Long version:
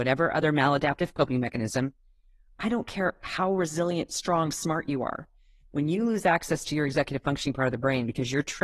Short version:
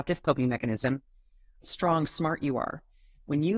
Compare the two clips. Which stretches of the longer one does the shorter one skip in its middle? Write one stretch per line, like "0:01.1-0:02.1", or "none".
0:02.5-0:04.1